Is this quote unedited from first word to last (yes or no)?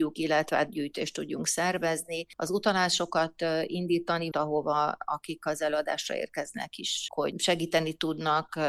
no